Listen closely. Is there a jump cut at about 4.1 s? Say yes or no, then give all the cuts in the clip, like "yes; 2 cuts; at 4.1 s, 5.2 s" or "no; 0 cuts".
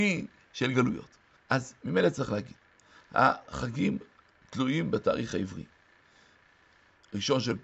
no; 1 cut; at 1.4 s